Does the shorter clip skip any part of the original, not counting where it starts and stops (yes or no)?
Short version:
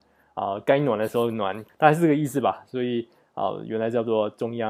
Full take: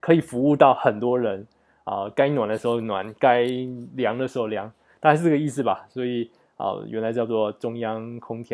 yes